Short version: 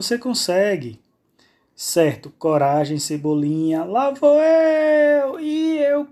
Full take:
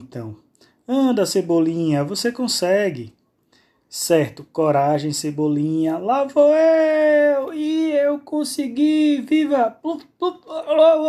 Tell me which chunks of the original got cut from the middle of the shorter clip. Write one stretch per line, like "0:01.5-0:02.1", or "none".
none